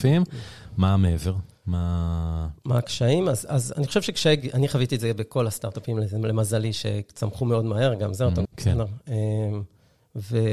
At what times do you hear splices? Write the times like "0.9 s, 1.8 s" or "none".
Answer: 8.4 s